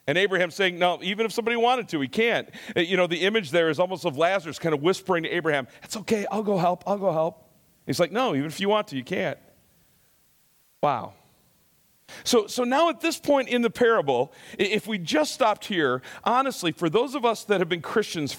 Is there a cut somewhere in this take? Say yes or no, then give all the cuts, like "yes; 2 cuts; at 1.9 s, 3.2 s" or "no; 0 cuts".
no; 0 cuts